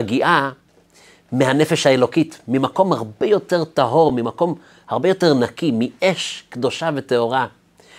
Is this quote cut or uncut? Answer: uncut